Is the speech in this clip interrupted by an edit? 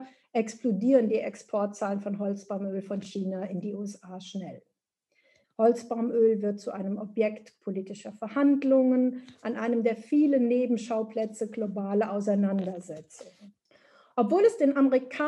yes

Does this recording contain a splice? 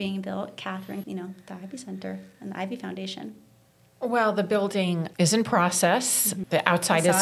yes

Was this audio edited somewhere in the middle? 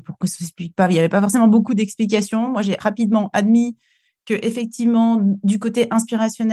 no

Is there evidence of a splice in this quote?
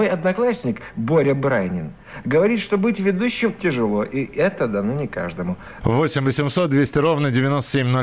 yes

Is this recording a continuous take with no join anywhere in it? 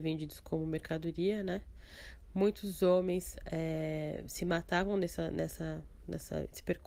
yes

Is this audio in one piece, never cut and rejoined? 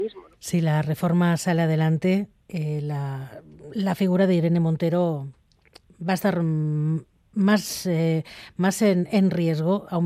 yes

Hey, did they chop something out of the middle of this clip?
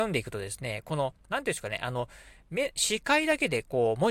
no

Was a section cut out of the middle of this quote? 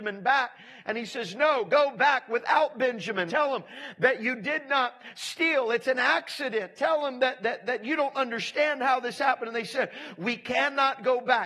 yes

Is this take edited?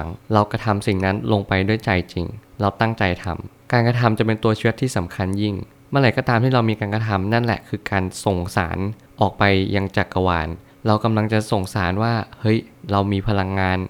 no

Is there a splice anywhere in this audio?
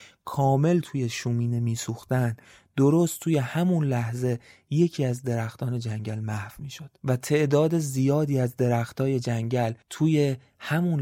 yes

